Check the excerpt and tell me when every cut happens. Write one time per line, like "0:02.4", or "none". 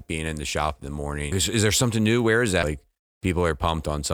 0:01.3
0:02.6